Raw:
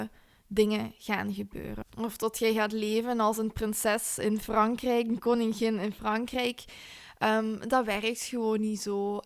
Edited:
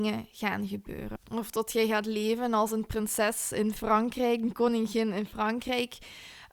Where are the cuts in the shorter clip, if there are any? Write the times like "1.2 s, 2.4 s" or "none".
none

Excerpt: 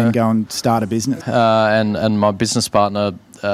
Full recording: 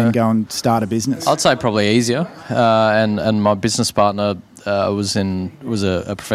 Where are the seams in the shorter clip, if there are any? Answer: 1.2 s

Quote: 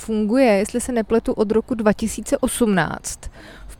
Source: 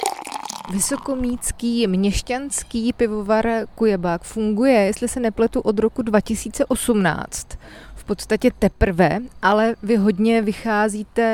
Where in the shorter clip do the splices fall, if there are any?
none

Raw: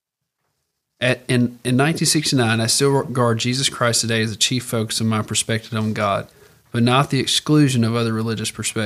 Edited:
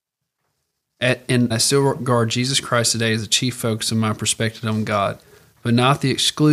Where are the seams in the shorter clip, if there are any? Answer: 1.5 s

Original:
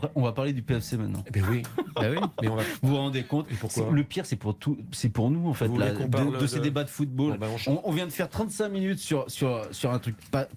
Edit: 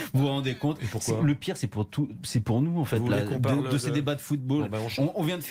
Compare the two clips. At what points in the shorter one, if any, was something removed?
none

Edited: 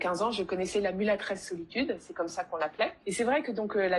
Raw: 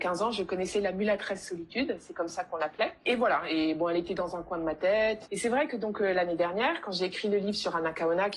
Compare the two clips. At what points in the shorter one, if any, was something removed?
3.0 s

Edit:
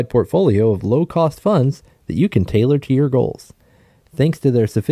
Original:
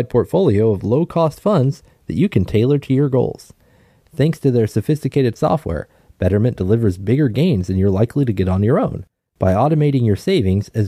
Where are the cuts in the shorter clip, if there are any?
none

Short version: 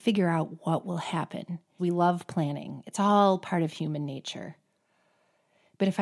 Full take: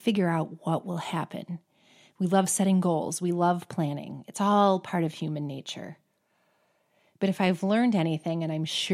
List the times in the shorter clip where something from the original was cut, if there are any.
1.8 s

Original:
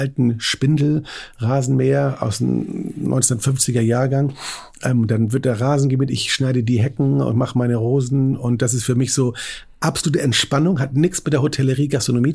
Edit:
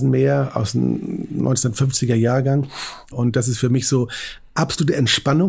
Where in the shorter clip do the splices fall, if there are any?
3.1 s

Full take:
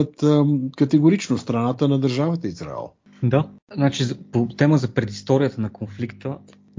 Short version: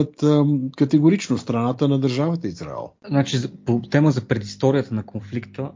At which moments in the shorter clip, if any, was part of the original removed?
3.0 s

